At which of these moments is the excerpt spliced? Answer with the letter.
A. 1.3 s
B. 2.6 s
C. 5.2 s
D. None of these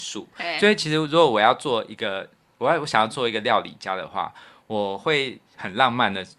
D